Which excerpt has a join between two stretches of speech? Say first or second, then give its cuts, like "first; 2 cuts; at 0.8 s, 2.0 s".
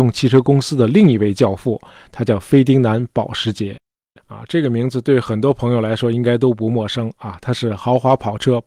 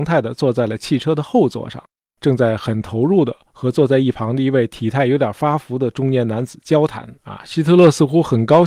second; 1 cut; at 7.2 s